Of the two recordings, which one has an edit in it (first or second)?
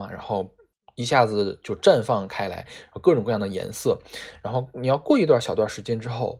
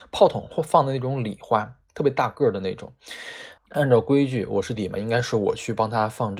second